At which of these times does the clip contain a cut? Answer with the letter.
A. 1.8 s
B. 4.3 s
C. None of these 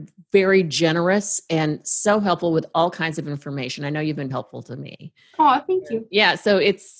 B